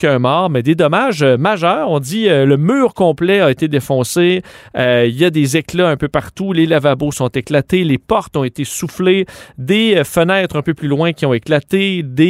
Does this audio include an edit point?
no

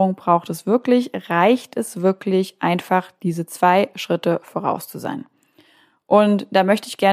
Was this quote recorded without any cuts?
yes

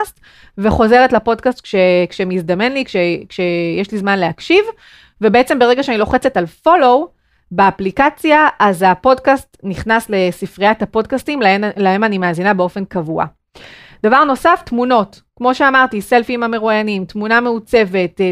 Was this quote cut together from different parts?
no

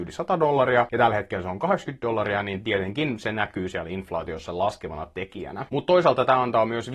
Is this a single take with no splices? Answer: no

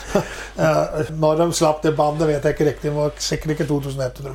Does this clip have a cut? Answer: yes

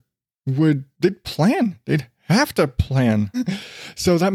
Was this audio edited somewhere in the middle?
yes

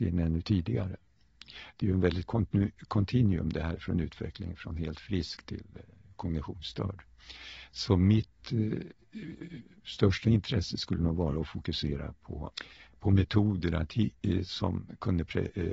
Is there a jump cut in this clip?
no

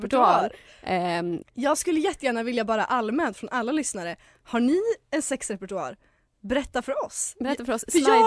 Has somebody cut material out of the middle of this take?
yes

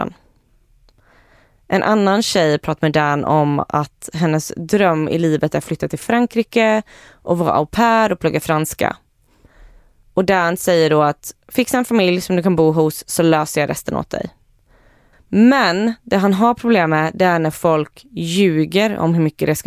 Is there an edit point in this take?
yes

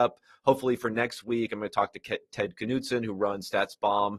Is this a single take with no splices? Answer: yes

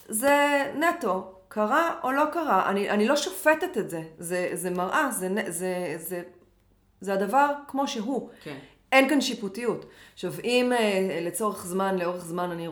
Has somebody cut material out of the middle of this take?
no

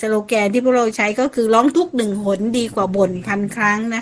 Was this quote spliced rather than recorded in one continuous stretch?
no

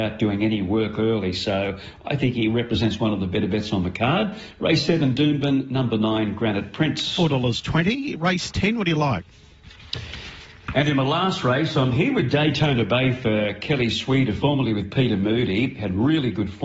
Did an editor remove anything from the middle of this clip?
no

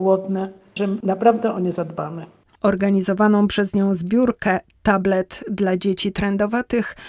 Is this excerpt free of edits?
no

